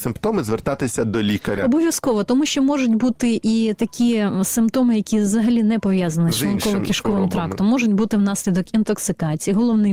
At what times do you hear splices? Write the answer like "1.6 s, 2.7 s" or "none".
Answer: none

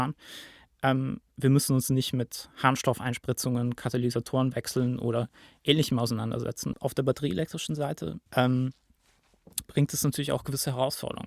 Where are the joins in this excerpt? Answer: 6.7 s, 8.3 s, 9.6 s

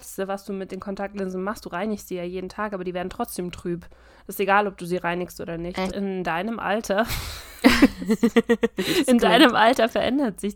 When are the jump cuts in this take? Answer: 5.9 s

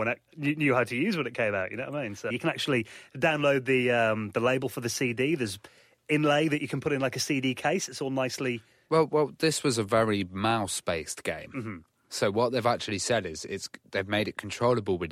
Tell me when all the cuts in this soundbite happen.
2.3 s

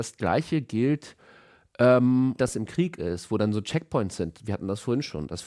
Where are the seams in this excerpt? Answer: 2.4 s

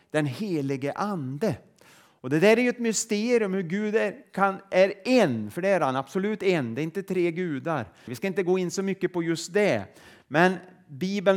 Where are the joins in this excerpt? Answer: 8.1 s

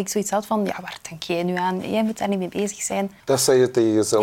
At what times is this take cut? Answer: 3.2 s

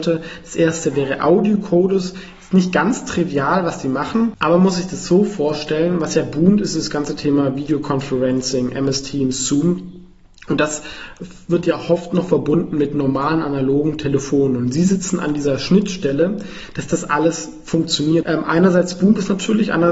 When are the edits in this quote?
18.2 s

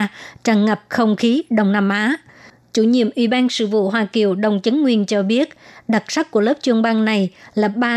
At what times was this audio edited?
none

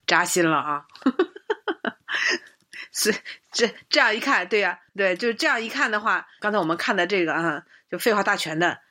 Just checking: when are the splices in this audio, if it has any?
4.9 s, 6.4 s

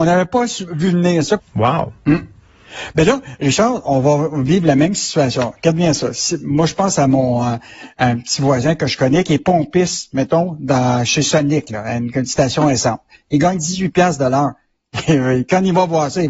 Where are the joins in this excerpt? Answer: 1.4 s

